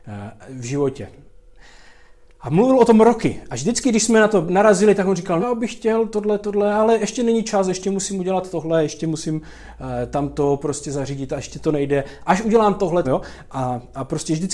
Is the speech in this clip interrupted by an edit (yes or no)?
yes